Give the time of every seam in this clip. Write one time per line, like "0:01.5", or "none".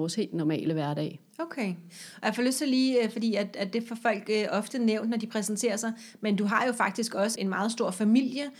0:07.4